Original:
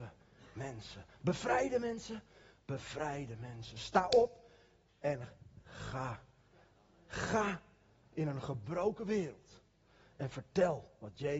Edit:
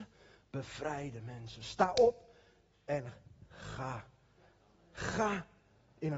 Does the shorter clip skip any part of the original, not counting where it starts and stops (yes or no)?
no